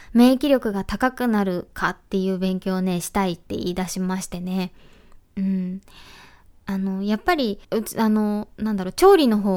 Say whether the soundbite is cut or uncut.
cut